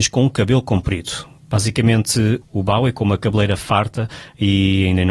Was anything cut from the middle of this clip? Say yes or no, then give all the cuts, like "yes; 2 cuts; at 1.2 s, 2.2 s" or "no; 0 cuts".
yes; 2 cuts; at 1.4 s, 2.4 s